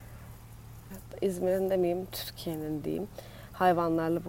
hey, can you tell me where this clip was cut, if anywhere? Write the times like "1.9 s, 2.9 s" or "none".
0.9 s